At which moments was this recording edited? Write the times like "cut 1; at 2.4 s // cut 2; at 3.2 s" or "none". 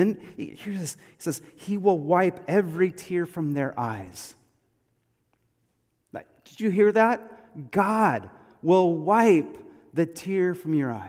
none